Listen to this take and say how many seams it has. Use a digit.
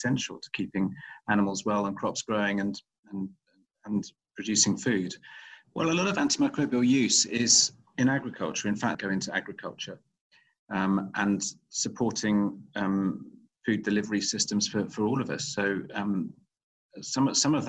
2